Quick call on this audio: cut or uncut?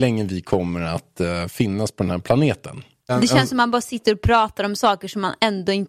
cut